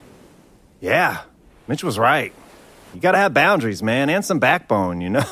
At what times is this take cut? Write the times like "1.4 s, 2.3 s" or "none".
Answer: 2.9 s